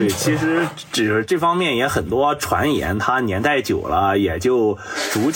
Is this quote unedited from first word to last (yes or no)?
yes